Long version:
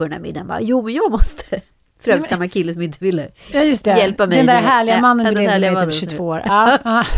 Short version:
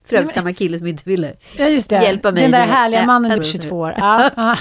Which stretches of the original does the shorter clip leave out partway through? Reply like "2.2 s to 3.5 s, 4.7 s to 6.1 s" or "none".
5.3 s to 5.9 s